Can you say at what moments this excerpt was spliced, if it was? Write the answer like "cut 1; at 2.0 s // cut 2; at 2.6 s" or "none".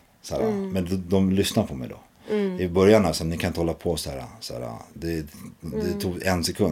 none